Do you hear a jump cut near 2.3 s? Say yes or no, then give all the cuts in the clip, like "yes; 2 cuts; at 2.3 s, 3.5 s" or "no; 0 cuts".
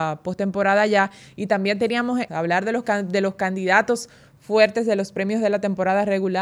yes; 1 cut; at 2.3 s